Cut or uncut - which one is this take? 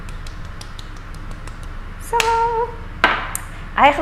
uncut